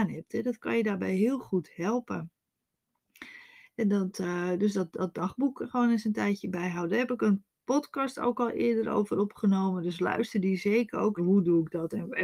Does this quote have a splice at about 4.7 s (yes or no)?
no